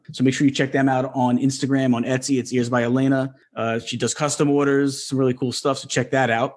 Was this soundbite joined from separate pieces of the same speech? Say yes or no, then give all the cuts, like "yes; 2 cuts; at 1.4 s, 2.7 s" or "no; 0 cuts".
no; 0 cuts